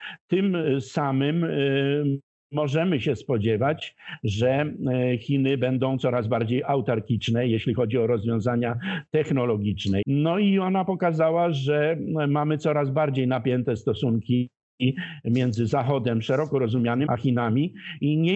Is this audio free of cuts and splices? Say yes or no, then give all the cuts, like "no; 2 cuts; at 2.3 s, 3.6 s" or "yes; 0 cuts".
no; 2 cuts; at 10.0 s, 17.1 s